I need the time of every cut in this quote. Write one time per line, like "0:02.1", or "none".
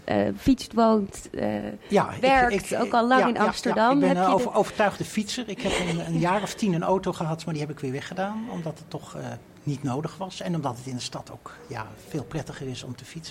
none